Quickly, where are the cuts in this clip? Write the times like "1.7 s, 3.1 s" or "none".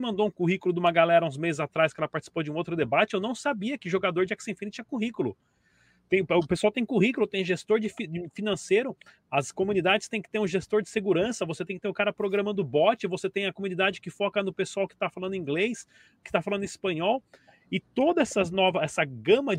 none